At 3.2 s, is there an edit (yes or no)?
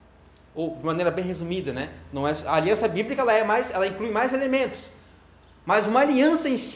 no